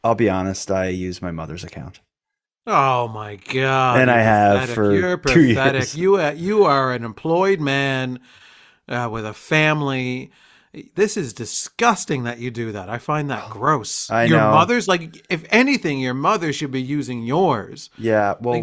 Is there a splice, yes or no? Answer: no